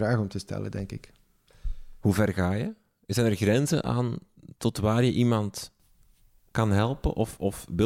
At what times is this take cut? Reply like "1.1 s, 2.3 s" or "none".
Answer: none